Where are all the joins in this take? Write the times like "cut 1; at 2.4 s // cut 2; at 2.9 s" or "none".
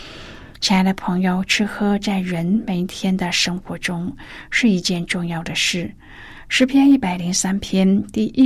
cut 1; at 6.5 s